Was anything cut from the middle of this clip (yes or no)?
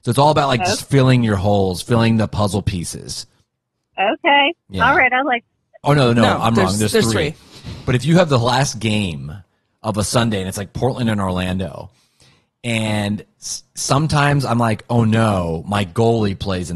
yes